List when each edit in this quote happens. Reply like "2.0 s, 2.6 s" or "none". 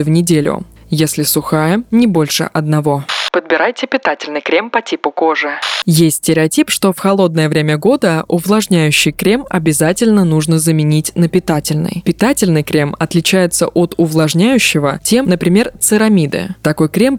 12.0 s, 15.2 s